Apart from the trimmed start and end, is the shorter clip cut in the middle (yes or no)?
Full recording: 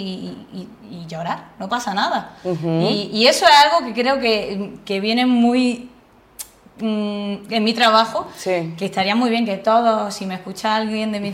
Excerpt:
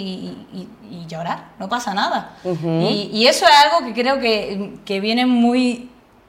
no